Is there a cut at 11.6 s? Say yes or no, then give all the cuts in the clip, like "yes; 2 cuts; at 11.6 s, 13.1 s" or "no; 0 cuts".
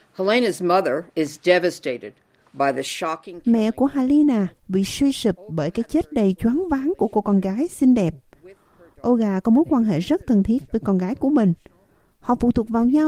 no; 2 cuts; at 1.1 s, 4.6 s